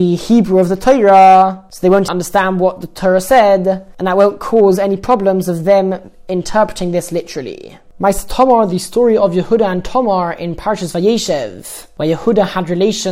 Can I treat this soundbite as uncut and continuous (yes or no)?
no